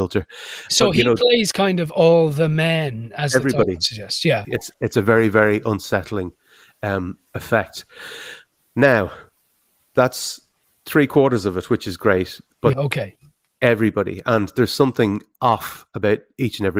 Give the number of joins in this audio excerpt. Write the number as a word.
two